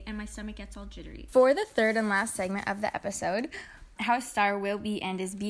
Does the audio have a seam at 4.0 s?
yes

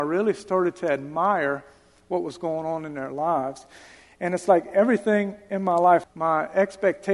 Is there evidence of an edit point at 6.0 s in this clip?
yes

